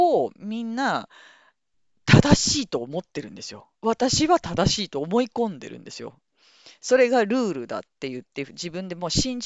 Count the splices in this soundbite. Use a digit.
0